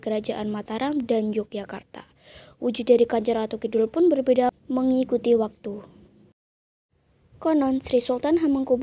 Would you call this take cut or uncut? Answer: uncut